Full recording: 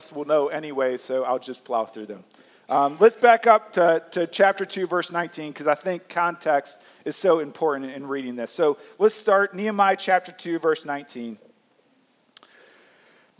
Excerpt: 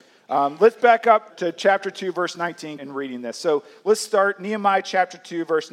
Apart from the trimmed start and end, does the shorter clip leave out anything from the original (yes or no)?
yes